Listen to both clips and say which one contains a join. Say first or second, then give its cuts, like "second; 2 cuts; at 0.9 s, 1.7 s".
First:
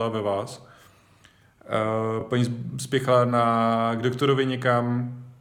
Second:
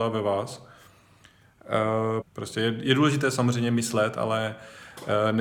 second; 1 cut; at 2.2 s